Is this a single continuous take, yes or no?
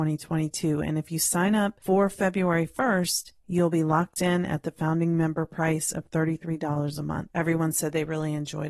no